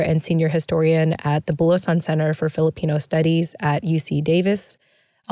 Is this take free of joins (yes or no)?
yes